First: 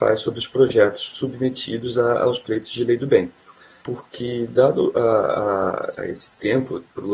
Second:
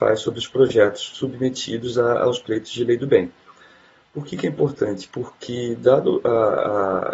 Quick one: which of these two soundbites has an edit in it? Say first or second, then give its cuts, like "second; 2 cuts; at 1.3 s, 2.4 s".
first; 2 cuts; at 3.8 s, 5.9 s